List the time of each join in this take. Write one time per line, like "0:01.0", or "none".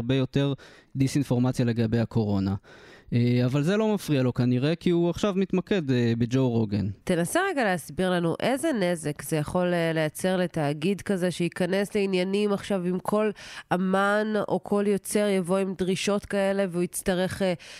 0:07.0